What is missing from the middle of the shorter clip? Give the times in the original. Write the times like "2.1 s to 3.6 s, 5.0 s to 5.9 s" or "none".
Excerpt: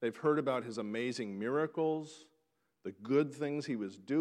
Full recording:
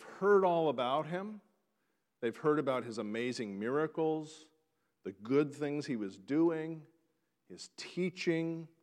none